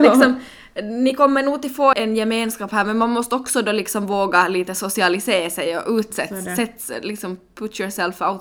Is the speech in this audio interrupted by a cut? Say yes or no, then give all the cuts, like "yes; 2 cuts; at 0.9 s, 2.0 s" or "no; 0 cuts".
yes; 1 cut; at 1.9 s